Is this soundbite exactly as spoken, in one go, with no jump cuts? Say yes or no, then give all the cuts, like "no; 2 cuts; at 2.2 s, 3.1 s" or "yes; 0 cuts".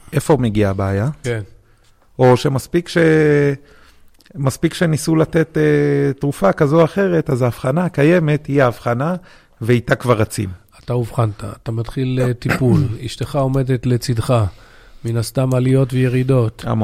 no; 1 cut; at 1.2 s